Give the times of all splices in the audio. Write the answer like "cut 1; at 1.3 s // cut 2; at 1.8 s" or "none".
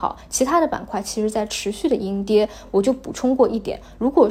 none